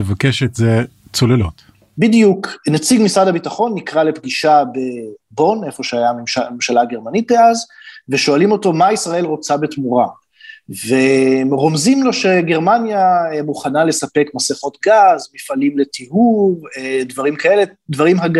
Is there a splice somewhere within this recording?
no; 0 cuts

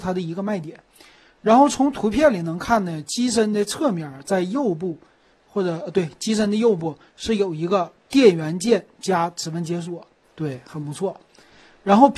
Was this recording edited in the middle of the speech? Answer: yes; 1 cut; at 10.2 s

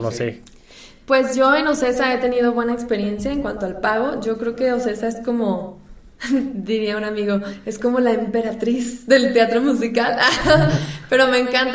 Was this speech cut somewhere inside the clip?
no; 0 cuts

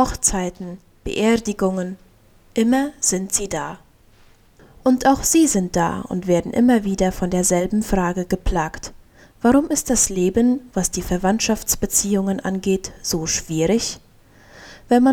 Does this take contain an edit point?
no; 0 cuts

